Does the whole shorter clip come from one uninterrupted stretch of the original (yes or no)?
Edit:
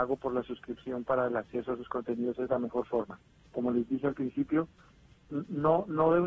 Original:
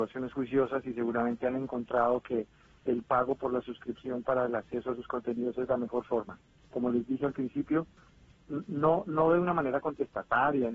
yes